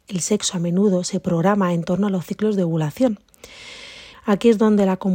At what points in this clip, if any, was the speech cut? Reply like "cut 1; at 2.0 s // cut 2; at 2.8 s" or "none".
cut 1; at 4.1 s